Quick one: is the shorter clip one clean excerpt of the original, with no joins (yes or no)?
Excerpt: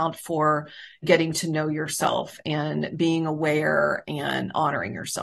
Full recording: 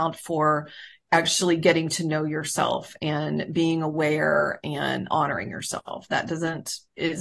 no